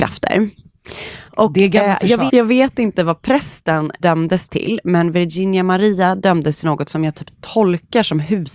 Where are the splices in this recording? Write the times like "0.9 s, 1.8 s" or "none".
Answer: 1.3 s, 2.3 s